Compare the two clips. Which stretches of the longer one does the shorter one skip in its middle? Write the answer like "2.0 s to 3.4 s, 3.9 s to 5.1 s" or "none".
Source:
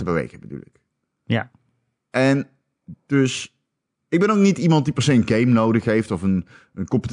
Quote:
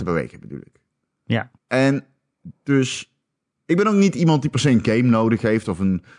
1.6 s to 2.0 s